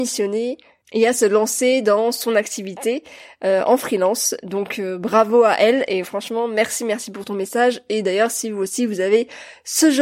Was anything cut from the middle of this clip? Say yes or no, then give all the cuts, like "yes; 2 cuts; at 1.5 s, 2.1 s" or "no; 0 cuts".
no; 0 cuts